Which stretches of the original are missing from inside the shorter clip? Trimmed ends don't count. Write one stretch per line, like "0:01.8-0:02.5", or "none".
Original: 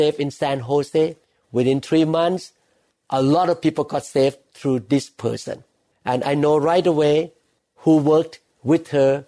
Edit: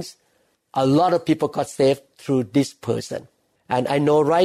none